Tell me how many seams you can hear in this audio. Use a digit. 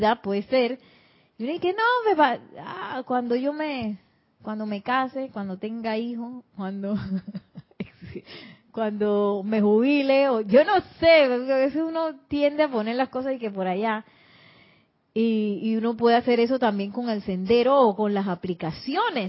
0